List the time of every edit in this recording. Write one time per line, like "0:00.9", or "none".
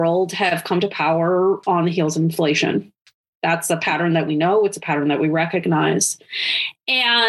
none